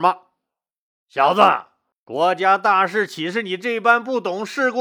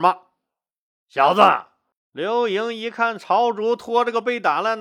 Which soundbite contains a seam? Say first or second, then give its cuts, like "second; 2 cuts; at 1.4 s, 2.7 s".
second; 1 cut; at 2.0 s